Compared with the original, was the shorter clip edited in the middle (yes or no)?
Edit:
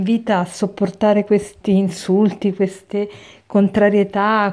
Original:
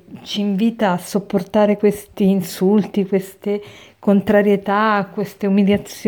no